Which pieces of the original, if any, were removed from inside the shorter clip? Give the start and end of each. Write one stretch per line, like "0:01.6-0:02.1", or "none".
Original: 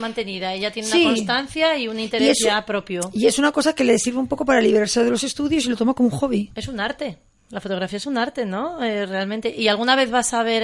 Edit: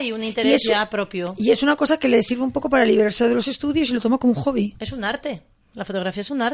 none